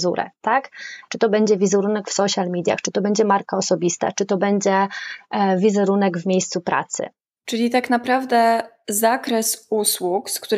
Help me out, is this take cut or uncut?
cut